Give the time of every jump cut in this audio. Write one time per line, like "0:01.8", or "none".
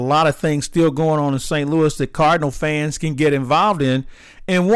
none

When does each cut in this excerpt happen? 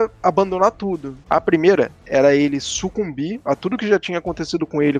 0:01.2

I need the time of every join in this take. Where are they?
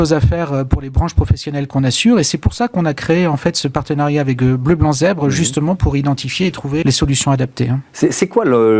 0:06.8

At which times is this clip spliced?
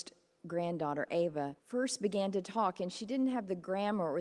0:01.6

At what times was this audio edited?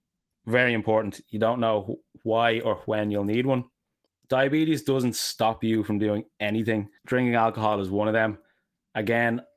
0:04.1
0:07.0

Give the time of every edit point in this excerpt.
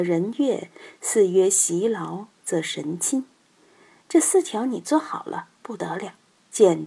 none

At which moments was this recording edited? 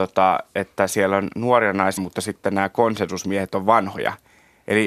0:02.0

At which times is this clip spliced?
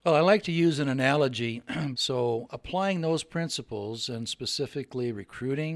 0:01.9

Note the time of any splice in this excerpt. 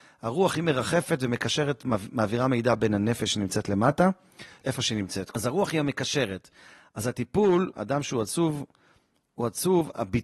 0:04.6
0:07.7

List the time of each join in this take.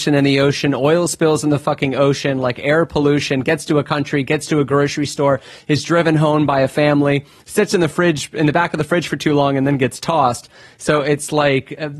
none

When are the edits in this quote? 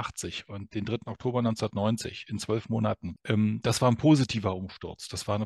0:03.2

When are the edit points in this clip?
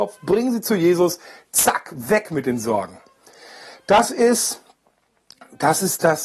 none

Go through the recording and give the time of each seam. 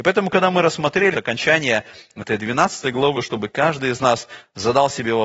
0:01.1
0:03.1

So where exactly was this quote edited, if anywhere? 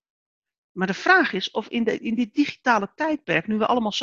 none

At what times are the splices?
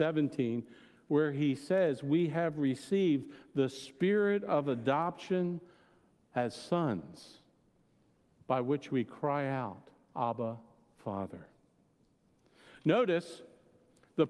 none

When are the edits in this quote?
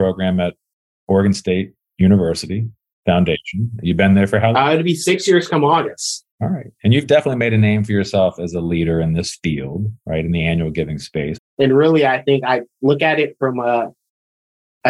0:06.3
0:11.4

